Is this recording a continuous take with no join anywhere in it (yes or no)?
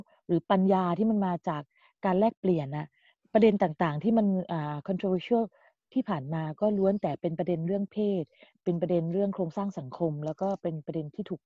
yes